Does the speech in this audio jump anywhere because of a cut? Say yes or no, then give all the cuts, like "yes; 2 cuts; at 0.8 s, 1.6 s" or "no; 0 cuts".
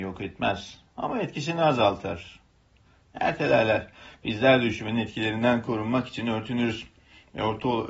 no; 0 cuts